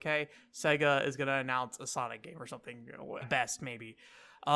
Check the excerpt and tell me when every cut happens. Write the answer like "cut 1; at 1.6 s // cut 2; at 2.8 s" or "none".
cut 1; at 3.2 s